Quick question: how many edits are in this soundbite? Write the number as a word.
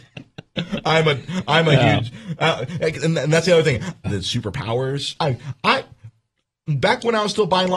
two